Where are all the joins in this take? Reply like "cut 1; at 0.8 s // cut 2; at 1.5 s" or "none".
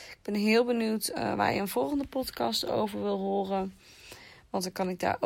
none